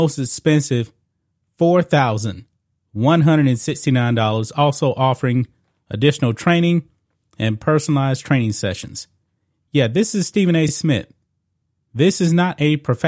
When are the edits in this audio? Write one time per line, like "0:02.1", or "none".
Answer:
none